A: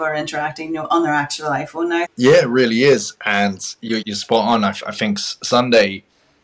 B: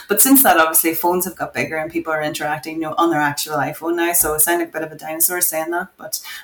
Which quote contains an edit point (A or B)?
A